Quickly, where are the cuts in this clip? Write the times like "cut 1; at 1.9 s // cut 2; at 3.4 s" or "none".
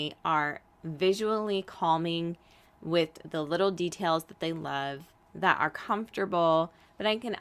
none